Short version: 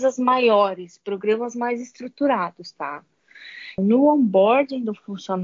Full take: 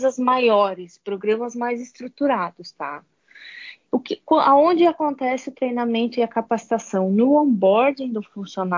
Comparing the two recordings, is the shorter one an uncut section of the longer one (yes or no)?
no